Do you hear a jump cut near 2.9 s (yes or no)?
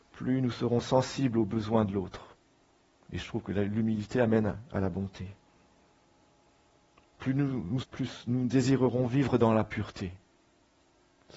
no